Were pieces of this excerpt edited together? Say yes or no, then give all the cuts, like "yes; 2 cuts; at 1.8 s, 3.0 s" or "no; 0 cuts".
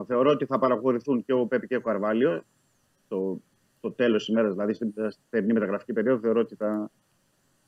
no; 0 cuts